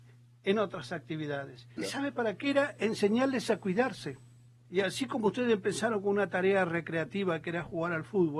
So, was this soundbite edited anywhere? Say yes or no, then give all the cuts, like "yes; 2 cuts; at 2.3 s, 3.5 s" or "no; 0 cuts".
yes; 2 cuts; at 1.8 s, 4.7 s